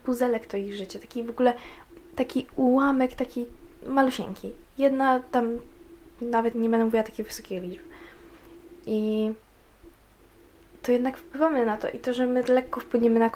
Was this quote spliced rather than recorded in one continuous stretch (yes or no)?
yes